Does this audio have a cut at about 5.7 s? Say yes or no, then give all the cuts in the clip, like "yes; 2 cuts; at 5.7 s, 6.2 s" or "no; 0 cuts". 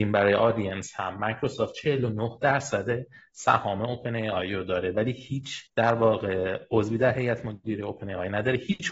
yes; 1 cut; at 5.7 s